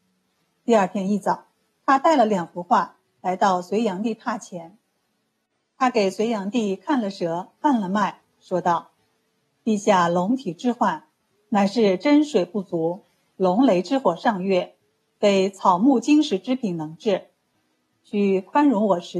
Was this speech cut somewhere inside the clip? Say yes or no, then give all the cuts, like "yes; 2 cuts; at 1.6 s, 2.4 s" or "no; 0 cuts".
no; 0 cuts